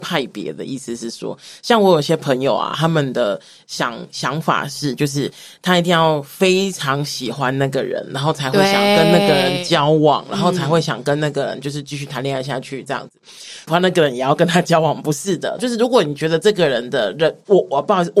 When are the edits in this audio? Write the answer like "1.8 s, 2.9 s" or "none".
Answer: 13.7 s, 15.6 s

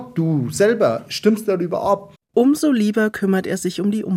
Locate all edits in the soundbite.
2.1 s

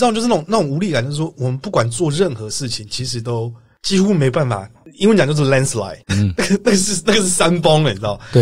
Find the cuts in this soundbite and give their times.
6.1 s

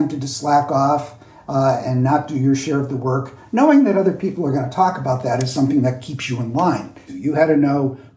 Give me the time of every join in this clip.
7.1 s

